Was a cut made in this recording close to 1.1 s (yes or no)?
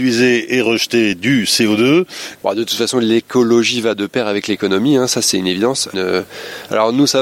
no